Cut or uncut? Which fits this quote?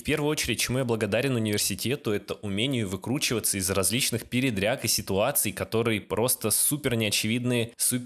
uncut